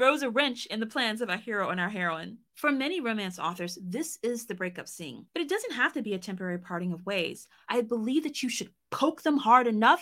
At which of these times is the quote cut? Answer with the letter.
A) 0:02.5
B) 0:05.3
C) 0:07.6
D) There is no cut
C